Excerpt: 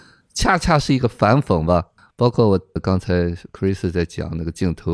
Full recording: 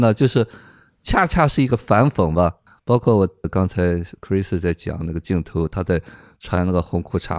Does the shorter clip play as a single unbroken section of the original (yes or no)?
yes